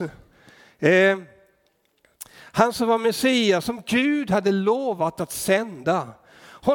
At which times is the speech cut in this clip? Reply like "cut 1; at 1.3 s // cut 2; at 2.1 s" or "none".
none